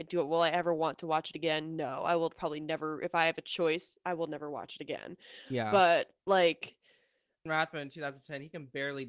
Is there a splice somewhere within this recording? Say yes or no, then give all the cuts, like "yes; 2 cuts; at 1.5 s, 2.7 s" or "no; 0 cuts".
yes; 1 cut; at 7.5 s